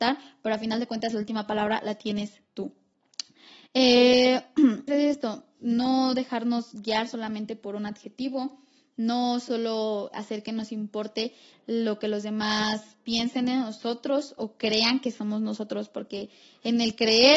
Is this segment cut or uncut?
cut